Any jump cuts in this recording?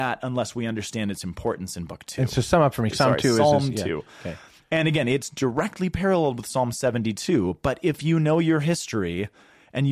yes; 1 cut; at 2.9 s

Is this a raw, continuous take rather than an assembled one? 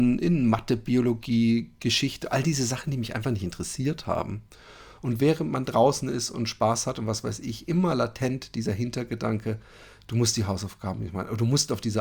no; 1 cut; at 5.0 s

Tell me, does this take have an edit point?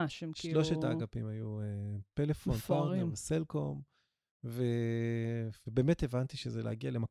no; 0 cuts

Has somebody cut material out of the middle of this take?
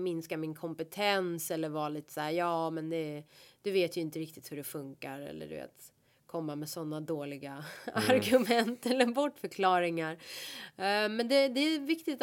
no; 0 cuts

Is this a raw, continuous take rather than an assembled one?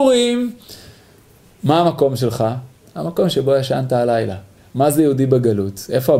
yes; 0 cuts

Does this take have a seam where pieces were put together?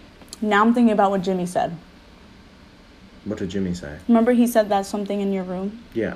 no; 0 cuts

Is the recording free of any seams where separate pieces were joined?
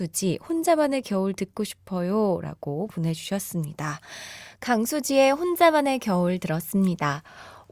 no; 1 cut; at 4.6 s

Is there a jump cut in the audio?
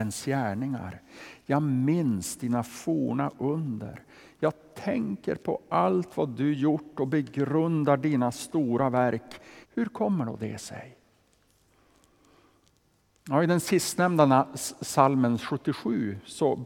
yes; 1 cut; at 9.6 s

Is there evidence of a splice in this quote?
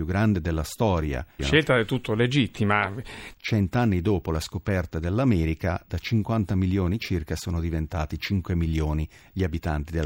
yes; 2 cuts; at 1.4 s, 3.3 s

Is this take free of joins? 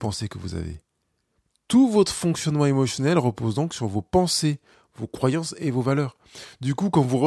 yes; 0 cuts

